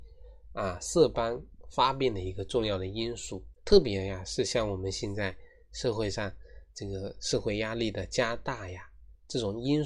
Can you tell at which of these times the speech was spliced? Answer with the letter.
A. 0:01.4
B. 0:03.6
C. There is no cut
B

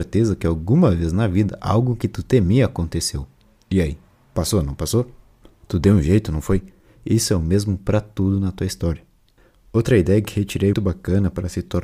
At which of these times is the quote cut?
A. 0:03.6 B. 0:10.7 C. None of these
B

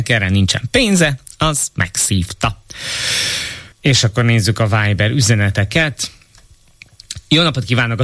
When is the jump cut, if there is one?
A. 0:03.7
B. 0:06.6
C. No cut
A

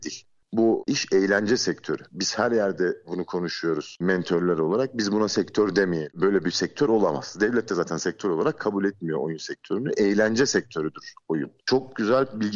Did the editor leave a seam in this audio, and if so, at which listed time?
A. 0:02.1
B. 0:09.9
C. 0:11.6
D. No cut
C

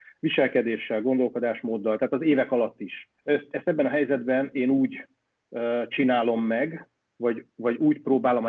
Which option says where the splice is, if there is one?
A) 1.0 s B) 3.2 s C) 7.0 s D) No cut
B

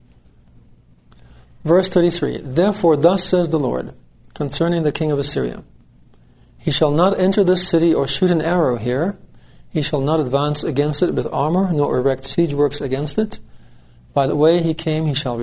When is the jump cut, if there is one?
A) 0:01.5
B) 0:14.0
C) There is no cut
C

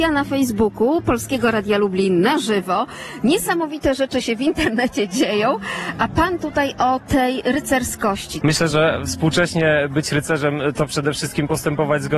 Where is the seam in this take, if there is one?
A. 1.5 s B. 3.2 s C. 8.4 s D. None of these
C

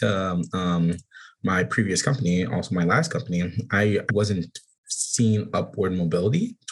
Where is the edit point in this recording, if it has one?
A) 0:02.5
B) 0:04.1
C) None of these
B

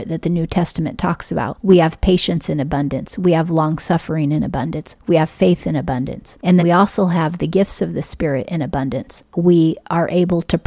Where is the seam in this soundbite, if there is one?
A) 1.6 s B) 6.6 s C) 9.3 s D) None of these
B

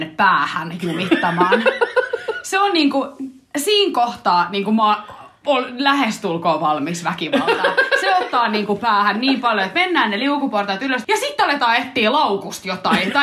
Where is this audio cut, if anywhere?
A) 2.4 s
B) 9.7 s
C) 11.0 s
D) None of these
C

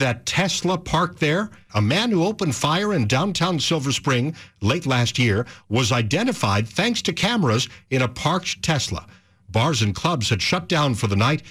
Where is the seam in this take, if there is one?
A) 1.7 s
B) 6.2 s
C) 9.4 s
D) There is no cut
A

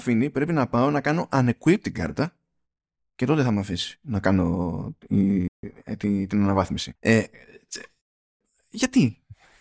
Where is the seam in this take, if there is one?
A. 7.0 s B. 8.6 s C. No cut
A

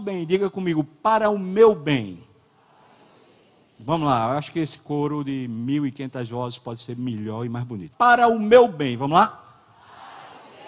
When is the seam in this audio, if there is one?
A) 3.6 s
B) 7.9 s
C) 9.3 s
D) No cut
B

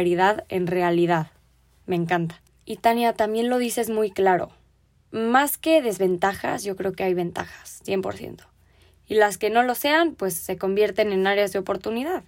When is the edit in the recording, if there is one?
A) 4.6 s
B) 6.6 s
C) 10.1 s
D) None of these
D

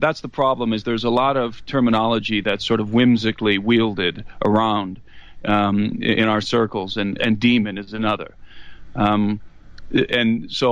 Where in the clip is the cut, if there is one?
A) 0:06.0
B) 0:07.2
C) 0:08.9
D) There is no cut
B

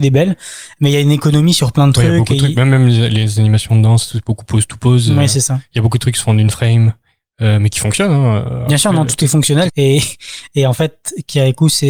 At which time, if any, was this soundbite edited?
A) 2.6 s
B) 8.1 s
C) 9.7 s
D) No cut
C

